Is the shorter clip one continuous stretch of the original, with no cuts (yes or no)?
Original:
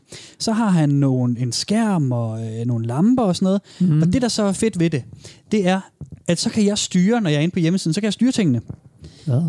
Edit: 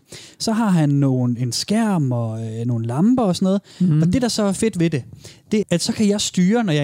no